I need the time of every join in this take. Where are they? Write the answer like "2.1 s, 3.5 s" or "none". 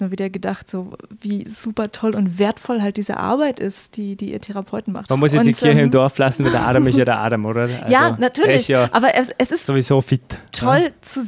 5.1 s, 9.7 s